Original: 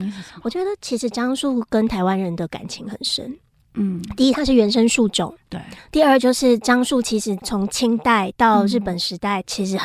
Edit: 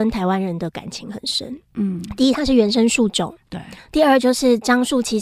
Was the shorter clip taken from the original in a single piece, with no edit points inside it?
no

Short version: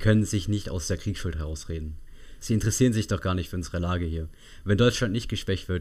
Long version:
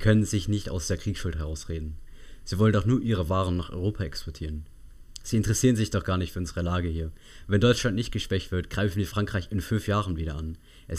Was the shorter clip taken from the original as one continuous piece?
no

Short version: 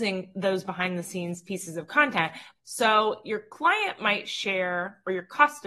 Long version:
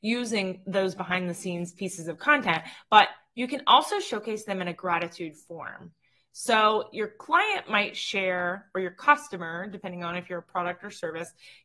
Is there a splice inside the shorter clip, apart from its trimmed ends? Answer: yes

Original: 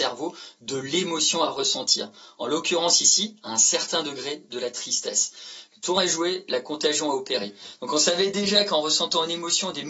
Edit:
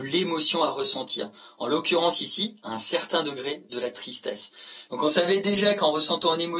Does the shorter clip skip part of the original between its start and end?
yes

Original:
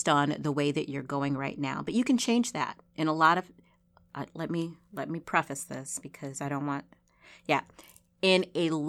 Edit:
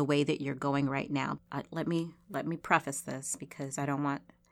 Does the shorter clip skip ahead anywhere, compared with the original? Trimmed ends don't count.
yes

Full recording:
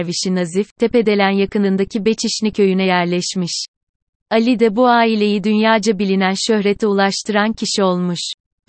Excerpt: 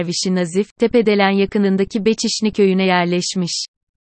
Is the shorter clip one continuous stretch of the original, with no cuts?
yes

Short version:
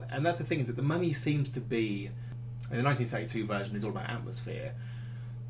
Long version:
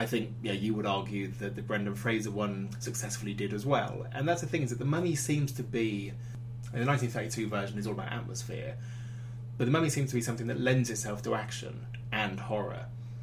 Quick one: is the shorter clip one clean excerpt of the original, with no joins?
yes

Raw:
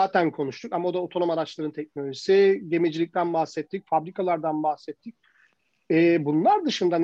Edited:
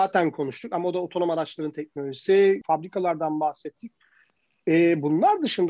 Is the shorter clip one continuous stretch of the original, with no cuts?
no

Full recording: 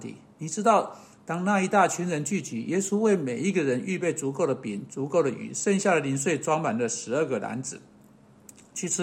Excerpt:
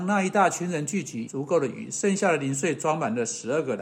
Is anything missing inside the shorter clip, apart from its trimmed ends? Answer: yes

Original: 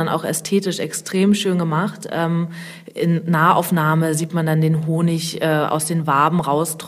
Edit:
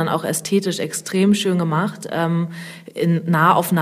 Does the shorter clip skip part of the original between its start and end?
no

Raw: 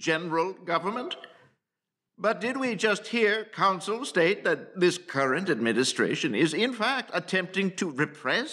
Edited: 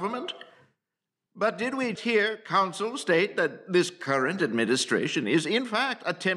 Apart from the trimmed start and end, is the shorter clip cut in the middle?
yes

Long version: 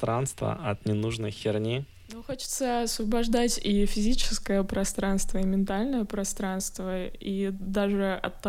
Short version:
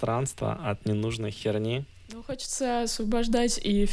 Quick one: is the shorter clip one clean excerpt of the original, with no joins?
yes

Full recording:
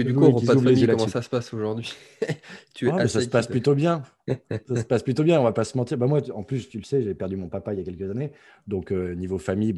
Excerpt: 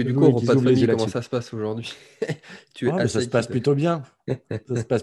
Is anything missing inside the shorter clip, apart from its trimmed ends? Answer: no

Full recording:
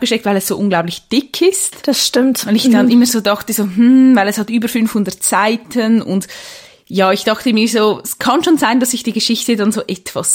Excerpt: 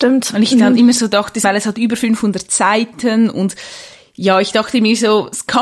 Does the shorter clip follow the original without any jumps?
no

